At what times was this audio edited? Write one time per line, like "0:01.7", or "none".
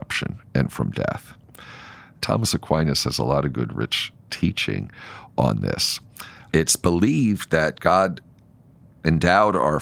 0:02.2
0:06.5